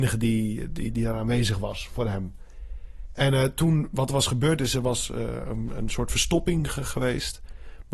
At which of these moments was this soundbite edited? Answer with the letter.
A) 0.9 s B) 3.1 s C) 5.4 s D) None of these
A